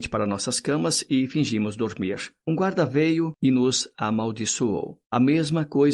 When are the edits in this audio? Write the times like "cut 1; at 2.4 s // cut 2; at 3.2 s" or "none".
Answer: cut 1; at 5.0 s